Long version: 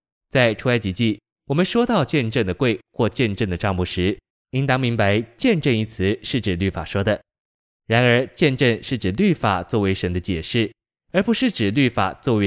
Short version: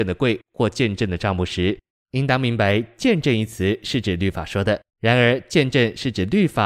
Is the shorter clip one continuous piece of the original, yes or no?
no